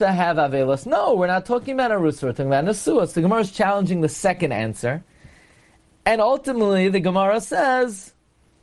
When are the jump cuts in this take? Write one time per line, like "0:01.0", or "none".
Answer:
none

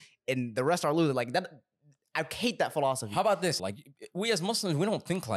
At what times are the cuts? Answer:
0:03.6

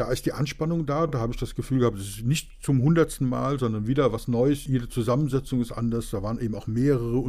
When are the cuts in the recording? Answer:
none

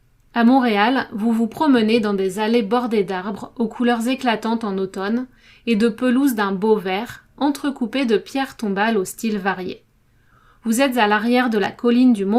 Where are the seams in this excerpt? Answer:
none

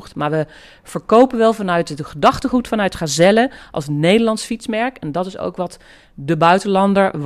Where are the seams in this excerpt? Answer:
none

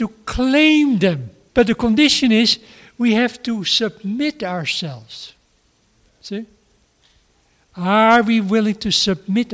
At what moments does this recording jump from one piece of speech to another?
0:01.5

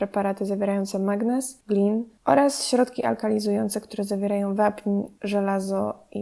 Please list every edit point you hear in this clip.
none

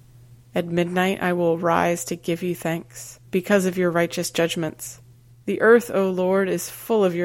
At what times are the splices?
0:03.2
0:05.3

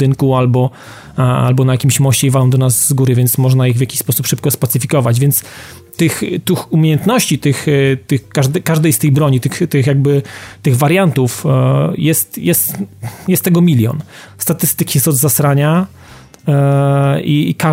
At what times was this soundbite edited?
0:14.3

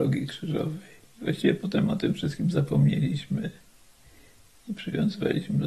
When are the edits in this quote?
0:01.1

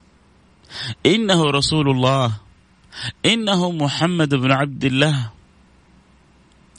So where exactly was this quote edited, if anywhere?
none

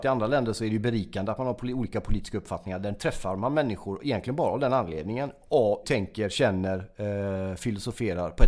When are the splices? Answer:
0:05.8

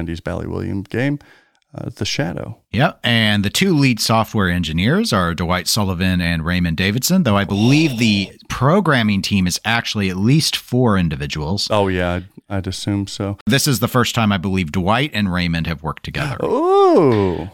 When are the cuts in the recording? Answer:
none

